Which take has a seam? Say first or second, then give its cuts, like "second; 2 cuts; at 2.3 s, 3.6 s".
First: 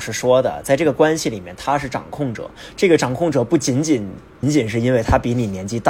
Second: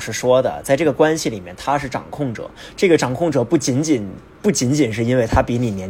first; 1 cut; at 4.4 s